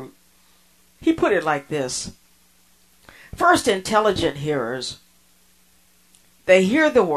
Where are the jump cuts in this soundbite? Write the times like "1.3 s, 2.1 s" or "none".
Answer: 1.0 s